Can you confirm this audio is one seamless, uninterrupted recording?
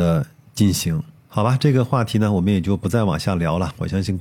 yes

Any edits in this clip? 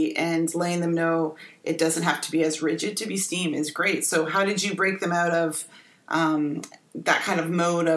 no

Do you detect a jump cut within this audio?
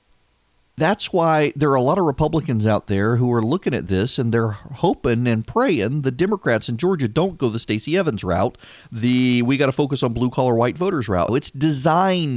yes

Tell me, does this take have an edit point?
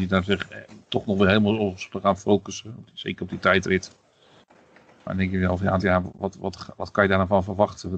yes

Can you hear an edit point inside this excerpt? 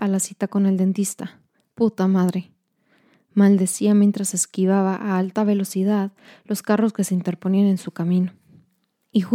no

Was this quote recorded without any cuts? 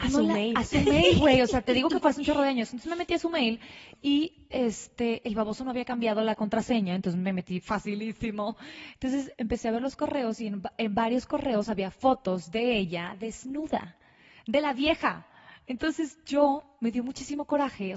no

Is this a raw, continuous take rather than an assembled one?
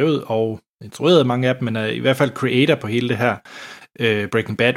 yes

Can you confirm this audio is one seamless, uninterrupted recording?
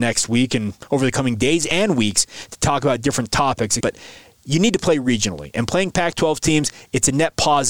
no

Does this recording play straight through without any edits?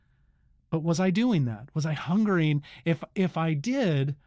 yes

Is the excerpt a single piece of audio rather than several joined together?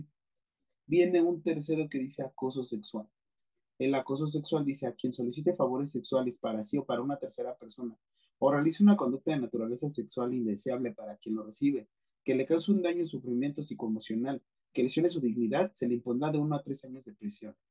yes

